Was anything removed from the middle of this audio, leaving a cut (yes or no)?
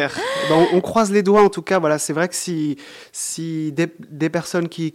no